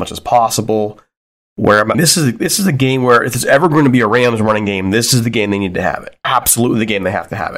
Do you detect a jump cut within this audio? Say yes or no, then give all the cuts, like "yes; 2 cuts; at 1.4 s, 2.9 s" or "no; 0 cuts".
yes; 2 cuts; at 1.9 s, 6.2 s